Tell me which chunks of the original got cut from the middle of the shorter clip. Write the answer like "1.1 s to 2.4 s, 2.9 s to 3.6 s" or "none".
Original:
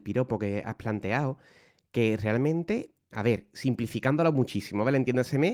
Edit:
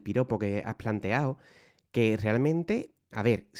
none